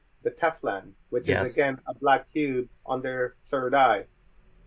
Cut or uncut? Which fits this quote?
uncut